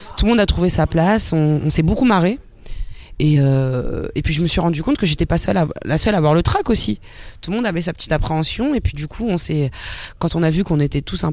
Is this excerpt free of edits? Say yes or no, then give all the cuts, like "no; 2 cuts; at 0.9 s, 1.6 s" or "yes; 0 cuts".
yes; 0 cuts